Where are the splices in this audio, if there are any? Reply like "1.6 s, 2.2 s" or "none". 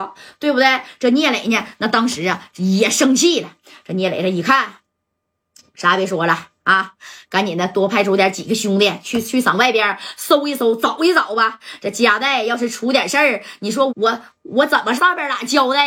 13.9 s, 15.0 s